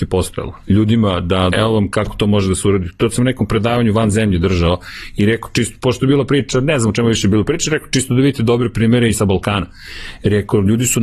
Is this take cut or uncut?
cut